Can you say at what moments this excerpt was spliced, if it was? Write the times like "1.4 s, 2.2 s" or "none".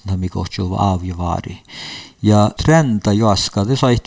2.6 s

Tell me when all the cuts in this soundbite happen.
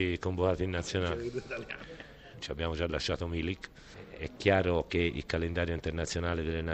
2.3 s

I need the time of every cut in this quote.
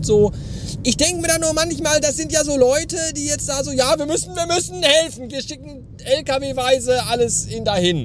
2.0 s, 5.3 s

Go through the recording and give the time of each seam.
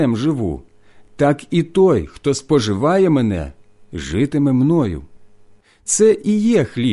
none

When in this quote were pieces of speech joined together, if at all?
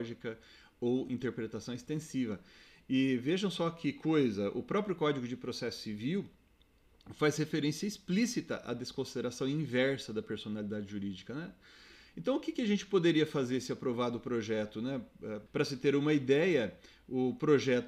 15.5 s

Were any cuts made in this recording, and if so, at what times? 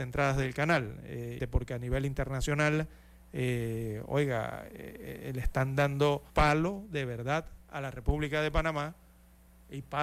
1.4 s, 6.3 s

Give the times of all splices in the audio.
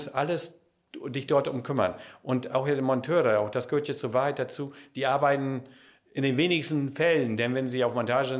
none

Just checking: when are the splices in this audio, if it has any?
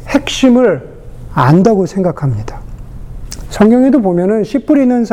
3.5 s

